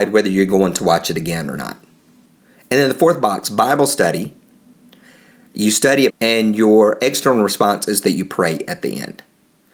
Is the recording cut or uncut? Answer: cut